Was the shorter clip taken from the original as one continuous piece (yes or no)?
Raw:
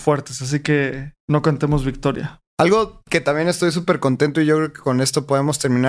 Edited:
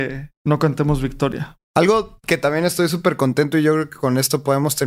yes